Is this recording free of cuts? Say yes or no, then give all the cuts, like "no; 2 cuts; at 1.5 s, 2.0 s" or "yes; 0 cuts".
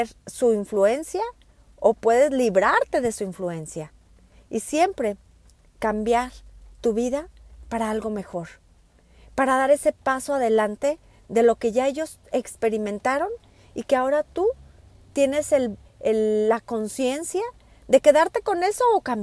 no; 1 cut; at 15.9 s